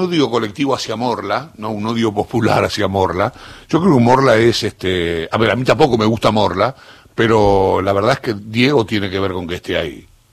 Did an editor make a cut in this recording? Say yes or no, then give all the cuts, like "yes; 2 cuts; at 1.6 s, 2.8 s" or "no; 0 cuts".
no; 0 cuts